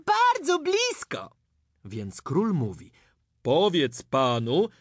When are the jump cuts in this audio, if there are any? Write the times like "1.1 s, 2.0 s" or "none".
none